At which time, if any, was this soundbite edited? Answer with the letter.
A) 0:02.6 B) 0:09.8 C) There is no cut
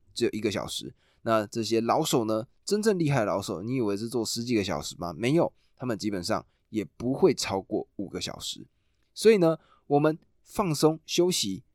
C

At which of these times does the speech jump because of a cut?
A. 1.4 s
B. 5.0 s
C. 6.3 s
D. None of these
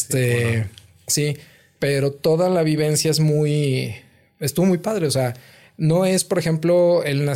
D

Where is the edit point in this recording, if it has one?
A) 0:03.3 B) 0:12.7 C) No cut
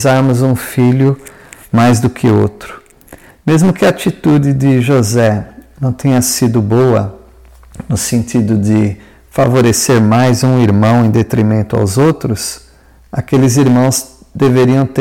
A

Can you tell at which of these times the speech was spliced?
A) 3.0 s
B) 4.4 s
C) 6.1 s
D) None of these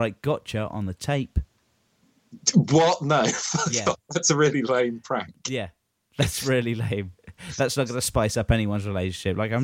D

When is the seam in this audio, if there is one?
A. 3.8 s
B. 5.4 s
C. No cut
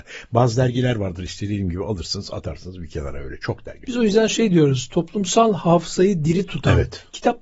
A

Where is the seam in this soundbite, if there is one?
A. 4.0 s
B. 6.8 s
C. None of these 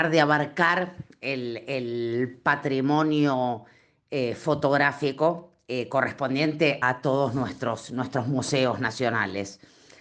B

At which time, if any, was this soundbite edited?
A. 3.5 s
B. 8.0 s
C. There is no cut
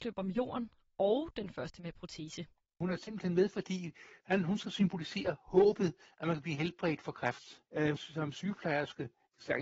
B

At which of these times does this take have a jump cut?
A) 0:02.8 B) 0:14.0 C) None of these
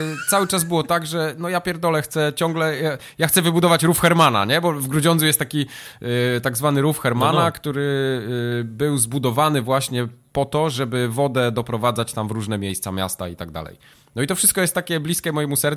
C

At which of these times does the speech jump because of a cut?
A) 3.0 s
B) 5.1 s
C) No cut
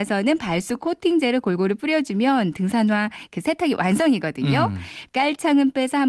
B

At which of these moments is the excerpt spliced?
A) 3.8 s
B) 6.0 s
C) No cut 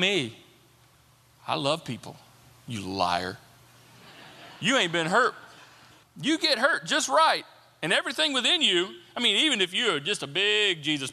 B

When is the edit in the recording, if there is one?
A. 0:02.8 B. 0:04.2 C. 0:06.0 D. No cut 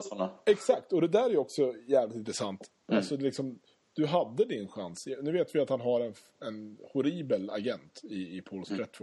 A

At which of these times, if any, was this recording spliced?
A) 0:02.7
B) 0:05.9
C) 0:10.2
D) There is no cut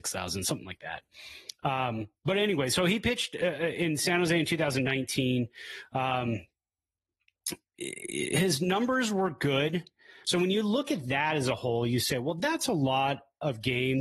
C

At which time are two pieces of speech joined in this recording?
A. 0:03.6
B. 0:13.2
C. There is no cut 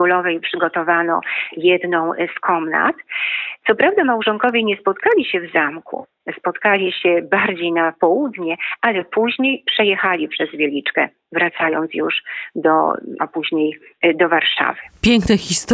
B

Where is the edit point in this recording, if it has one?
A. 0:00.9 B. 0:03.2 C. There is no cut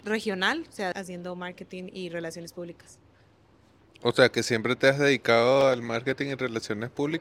A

